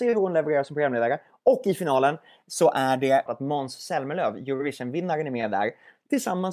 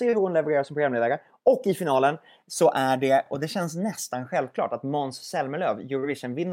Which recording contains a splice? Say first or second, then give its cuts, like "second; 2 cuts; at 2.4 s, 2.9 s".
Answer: first; 1 cut; at 3.3 s